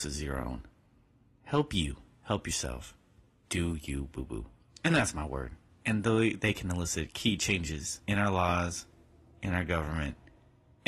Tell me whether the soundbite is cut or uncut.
cut